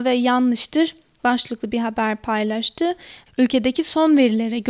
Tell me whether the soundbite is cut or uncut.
cut